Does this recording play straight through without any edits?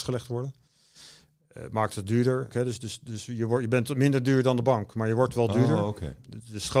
no; 1 cut; at 2.5 s

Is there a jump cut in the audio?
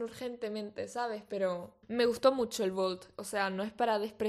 yes; 1 cut; at 1.8 s

